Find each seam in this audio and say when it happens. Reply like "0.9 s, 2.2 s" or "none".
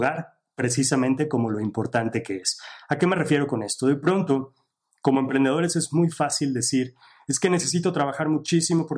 none